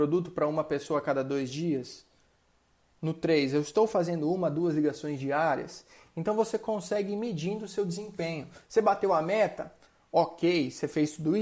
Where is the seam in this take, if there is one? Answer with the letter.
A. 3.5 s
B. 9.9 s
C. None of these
C